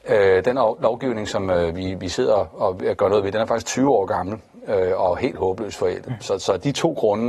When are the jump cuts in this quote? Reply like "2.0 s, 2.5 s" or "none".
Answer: none